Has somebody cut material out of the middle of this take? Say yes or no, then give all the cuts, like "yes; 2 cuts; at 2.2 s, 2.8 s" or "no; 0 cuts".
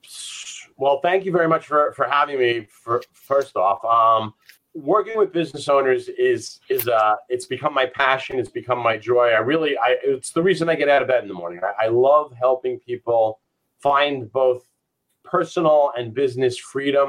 yes; 1 cut; at 4.6 s